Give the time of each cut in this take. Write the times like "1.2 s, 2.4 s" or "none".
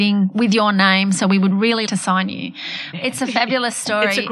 1.9 s, 2.9 s